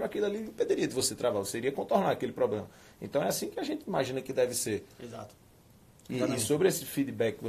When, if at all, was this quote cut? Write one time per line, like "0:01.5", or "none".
none